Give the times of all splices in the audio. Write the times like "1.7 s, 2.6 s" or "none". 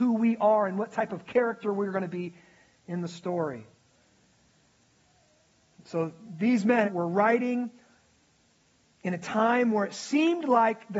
6.8 s